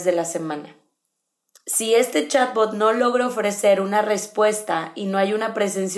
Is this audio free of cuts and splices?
no; 1 cut; at 1.5 s

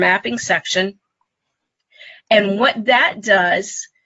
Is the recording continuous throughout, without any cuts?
yes; 0 cuts

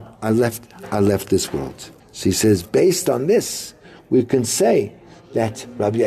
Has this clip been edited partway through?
yes; 1 cut; at 2.0 s

